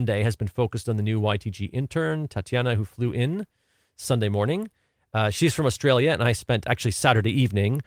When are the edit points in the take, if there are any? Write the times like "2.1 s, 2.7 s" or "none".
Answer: none